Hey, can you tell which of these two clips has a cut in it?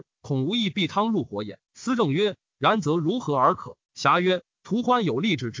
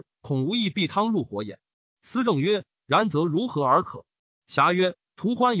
first; 2 cuts; at 1.6 s, 3.8 s

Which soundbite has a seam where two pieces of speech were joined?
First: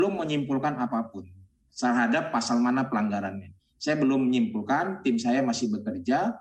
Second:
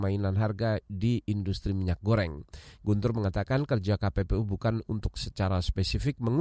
second; 1 cut; at 2.8 s

